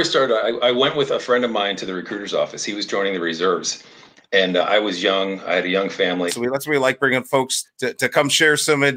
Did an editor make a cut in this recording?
yes; 2 cuts; at 6.3 s, 7.6 s

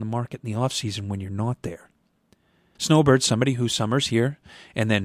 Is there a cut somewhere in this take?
yes; 1 cut; at 2.8 s

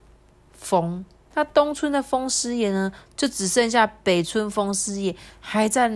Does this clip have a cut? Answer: yes; 2 cuts; at 1.3 s, 3.1 s

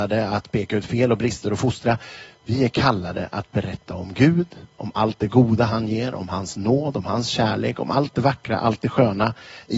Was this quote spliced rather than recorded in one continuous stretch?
no; 0 cuts

